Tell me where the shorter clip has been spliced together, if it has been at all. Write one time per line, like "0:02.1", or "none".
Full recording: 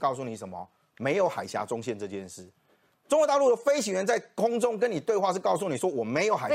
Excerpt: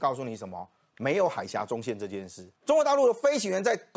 0:02.6